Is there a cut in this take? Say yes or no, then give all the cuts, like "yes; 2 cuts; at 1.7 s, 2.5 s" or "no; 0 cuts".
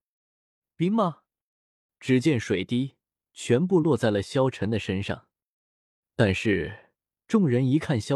yes; 1 cut; at 1.9 s